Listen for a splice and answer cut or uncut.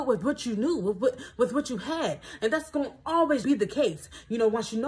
cut